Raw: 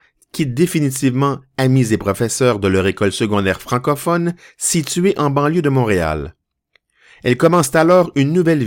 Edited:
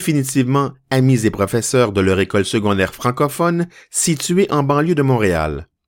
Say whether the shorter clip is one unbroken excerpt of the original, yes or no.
yes